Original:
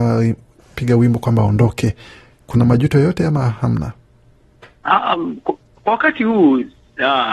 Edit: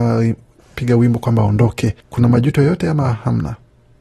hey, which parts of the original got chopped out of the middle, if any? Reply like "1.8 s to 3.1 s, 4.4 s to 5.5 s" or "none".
2.0 s to 2.4 s